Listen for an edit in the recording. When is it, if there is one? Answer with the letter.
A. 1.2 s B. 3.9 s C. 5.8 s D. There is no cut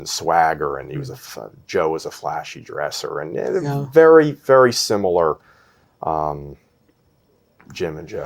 D